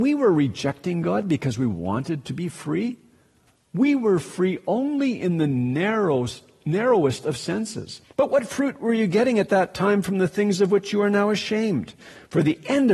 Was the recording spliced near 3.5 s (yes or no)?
no